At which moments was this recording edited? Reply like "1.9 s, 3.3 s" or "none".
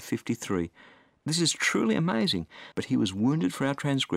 2.7 s